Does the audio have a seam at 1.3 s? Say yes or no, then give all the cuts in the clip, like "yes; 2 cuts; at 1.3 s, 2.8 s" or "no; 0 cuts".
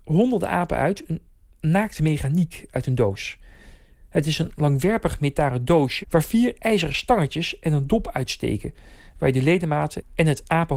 no; 1 cut; at 6.0 s